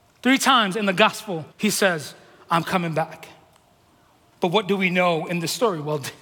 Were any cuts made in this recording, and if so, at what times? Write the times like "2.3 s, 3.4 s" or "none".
1.5 s